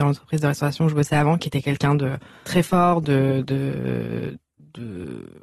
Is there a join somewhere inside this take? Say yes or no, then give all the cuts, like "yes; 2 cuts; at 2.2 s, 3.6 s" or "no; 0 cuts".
no; 0 cuts